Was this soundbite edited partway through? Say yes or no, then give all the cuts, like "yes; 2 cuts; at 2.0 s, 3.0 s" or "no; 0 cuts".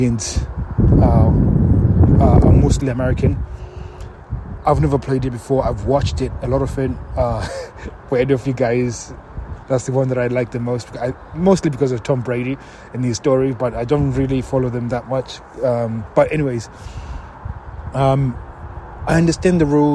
yes; 1 cut; at 9.6 s